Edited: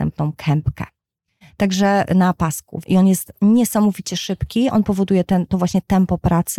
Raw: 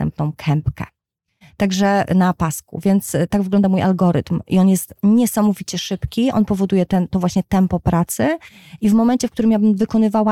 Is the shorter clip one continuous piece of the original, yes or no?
no